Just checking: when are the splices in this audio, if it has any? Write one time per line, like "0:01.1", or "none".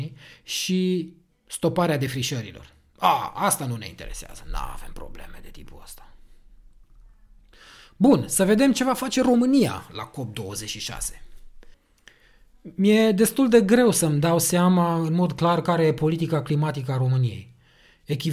none